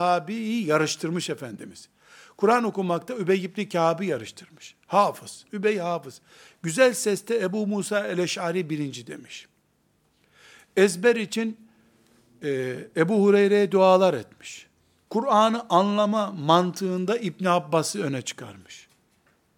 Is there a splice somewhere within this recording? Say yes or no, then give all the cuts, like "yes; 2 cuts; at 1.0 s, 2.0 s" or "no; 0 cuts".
yes; 2 cuts; at 5.5 s, 15.1 s